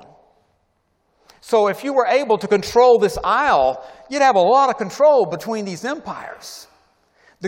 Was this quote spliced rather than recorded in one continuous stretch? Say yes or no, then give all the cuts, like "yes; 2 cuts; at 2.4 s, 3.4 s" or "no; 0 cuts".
no; 0 cuts